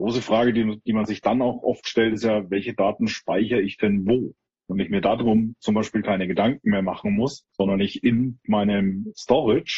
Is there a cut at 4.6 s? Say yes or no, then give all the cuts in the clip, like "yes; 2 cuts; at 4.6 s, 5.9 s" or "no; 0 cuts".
yes; 1 cut; at 4.6 s